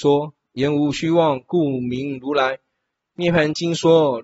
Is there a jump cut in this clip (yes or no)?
no